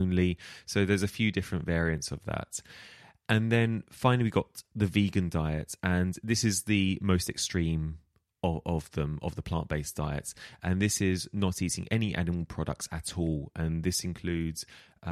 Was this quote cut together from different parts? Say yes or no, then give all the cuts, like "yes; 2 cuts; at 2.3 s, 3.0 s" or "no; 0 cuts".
no; 0 cuts